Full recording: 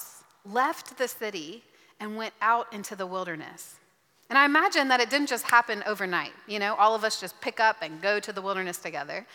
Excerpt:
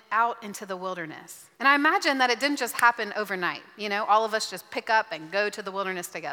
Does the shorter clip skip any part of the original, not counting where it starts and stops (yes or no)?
yes